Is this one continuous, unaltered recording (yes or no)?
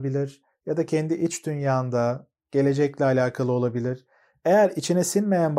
yes